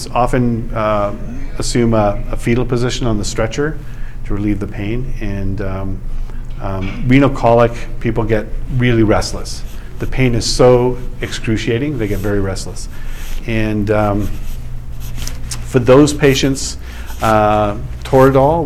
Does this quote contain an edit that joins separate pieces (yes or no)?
no